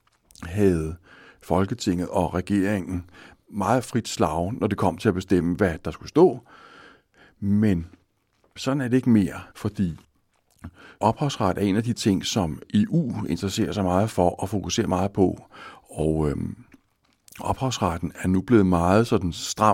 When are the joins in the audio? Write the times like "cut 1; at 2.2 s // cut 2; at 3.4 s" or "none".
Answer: cut 1; at 9.5 s